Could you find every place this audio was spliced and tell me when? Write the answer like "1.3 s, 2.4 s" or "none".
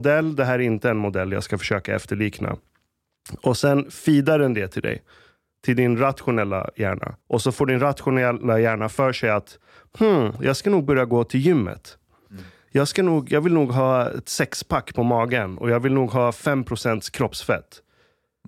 7.2 s